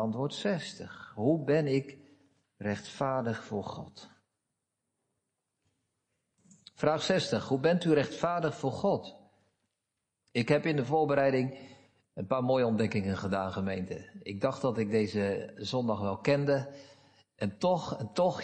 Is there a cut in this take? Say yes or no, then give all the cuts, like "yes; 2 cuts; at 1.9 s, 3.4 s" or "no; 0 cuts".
no; 0 cuts